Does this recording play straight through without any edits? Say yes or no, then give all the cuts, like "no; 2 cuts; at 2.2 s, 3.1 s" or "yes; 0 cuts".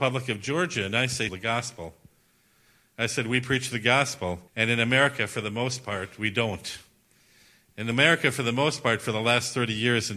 no; 2 cuts; at 1.3 s, 4.5 s